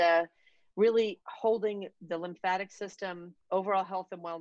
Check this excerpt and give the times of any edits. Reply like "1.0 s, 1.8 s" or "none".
3.4 s